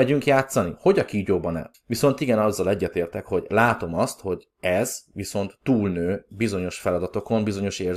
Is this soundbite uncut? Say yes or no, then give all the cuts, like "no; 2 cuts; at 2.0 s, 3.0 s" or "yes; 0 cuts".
no; 1 cut; at 1.7 s